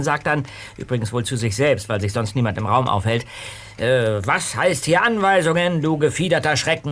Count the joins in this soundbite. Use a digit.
0